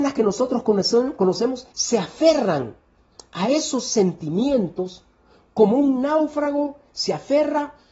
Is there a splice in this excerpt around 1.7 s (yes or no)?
yes